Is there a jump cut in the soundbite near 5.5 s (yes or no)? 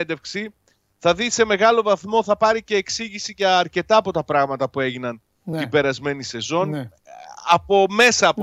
no